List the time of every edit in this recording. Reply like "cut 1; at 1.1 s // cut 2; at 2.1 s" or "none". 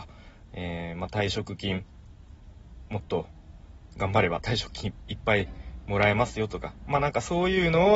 cut 1; at 2.9 s